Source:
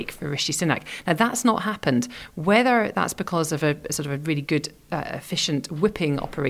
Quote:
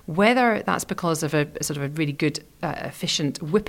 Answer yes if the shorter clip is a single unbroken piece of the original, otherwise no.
yes